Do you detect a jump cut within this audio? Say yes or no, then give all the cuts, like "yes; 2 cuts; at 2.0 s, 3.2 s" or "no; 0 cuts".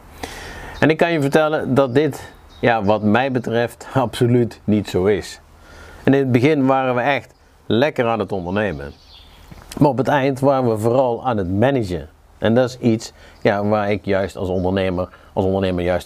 no; 0 cuts